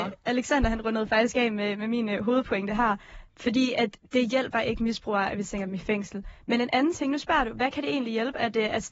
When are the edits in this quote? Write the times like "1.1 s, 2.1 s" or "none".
none